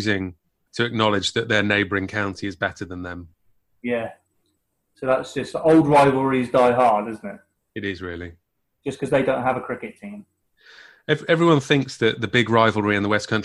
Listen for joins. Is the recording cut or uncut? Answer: uncut